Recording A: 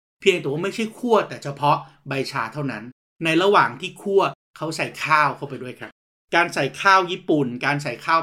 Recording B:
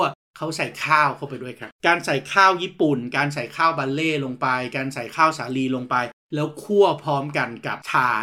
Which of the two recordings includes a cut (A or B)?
B